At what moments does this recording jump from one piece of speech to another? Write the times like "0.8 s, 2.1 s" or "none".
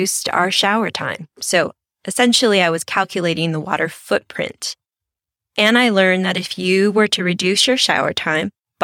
none